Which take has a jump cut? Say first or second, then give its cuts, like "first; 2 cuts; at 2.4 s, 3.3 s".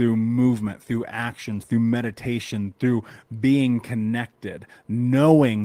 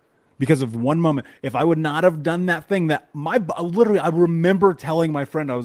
first; 1 cut; at 1.6 s